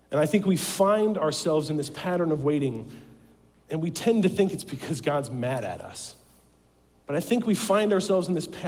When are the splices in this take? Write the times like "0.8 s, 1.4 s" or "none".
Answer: 7.0 s